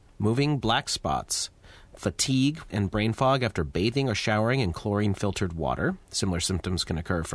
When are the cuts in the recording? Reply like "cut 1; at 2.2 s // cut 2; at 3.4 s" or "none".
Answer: cut 1; at 2.7 s